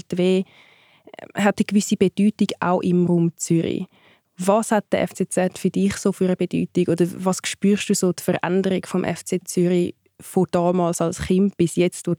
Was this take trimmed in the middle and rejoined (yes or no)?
no